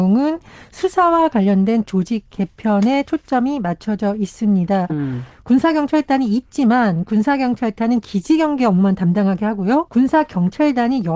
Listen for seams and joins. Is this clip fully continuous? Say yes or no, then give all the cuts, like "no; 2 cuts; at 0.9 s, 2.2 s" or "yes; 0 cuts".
no; 2 cuts; at 4.9 s, 9.9 s